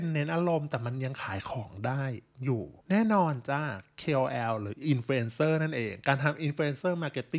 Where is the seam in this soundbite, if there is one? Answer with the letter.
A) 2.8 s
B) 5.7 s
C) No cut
A